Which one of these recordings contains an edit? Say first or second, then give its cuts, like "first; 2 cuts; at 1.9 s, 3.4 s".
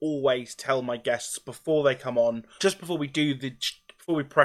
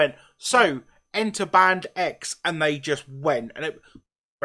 first; 1 cut; at 2.6 s